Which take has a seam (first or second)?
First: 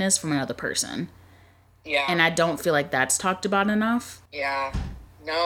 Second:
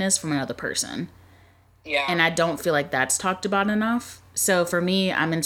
first